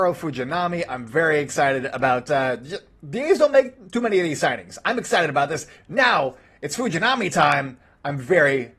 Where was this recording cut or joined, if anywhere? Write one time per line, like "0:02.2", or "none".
0:05.8